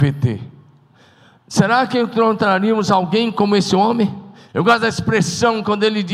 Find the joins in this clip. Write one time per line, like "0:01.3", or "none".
0:04.5